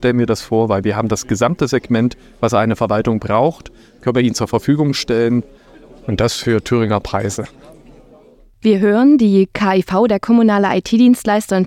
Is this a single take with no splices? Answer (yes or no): yes